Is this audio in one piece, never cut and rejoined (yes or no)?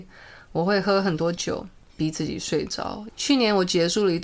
no